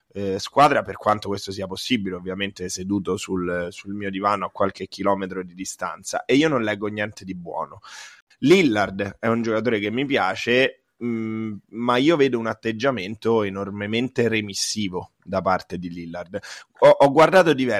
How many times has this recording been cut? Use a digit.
1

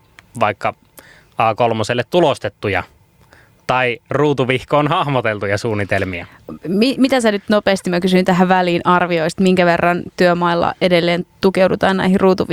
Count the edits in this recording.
0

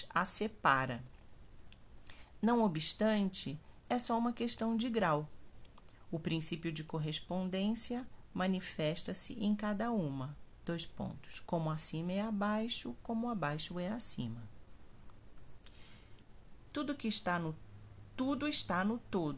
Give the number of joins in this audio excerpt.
2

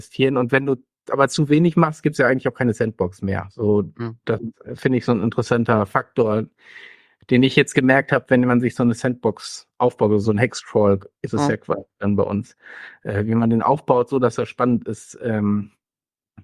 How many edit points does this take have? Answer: 0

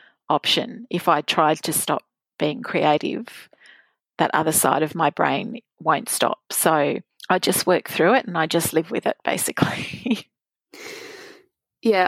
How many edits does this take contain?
0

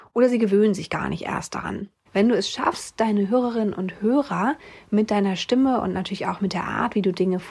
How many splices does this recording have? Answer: 1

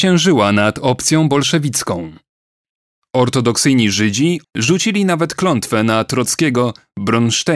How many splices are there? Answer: 1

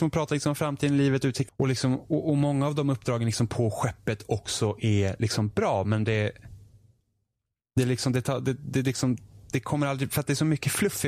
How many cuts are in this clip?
1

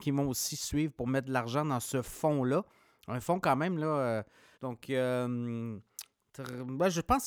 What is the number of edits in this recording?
1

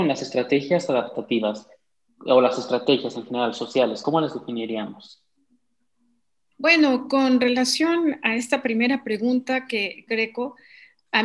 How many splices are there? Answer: 2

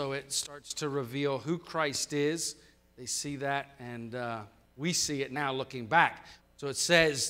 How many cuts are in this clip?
1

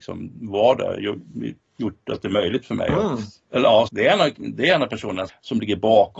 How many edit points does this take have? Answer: 2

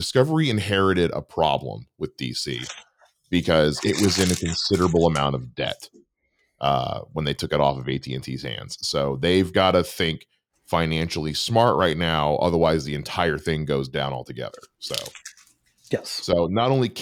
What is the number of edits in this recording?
0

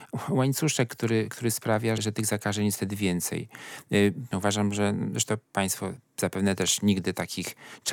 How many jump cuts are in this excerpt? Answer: 2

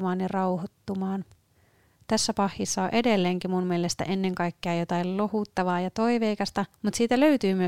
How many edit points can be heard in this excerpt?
1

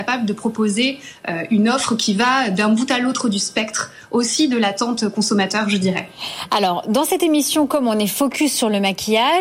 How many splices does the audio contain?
0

